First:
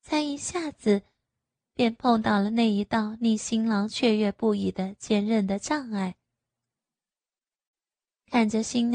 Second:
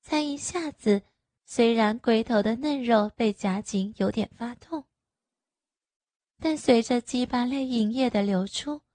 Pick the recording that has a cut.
second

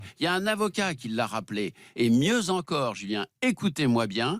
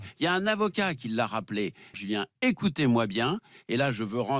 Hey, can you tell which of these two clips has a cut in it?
second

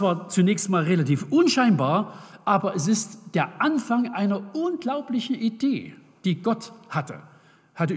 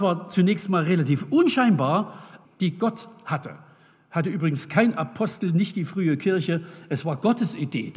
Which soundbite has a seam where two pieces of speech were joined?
second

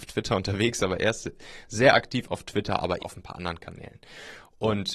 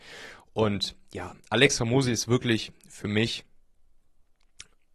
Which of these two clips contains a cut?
first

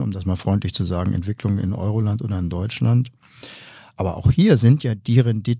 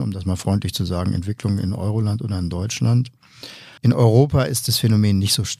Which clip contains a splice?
second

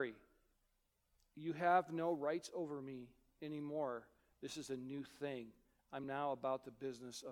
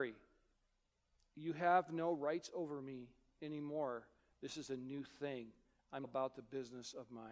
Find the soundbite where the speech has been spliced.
second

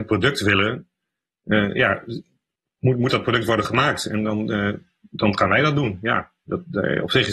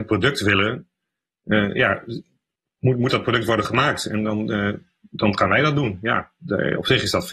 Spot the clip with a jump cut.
second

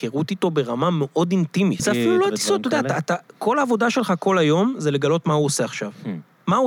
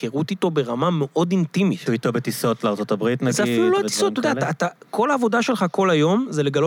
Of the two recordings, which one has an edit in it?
first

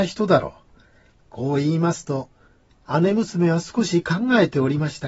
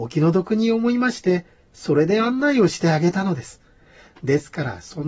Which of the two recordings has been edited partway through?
first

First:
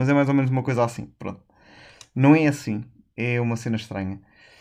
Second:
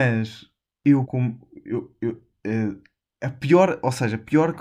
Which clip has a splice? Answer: second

